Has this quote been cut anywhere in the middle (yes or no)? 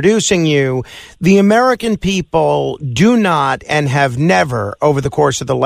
no